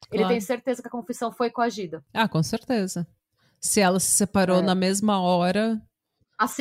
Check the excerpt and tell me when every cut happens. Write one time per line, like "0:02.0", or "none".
none